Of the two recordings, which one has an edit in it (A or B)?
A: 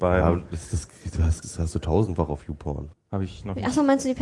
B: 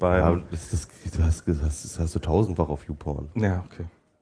A